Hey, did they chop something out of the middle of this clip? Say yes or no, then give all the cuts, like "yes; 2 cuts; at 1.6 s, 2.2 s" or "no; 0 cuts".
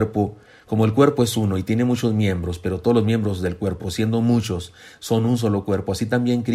no; 0 cuts